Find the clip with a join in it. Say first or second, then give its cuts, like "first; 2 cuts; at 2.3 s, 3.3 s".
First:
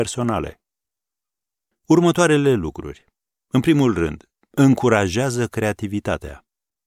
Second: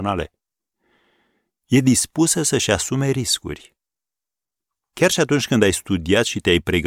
first; 1 cut; at 1.7 s